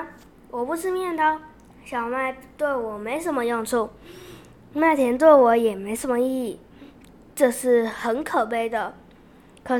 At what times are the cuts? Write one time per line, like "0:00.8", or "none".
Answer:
none